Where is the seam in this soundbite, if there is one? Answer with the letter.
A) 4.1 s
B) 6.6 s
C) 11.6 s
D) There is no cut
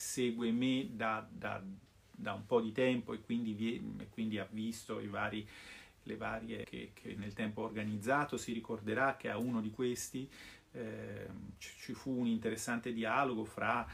B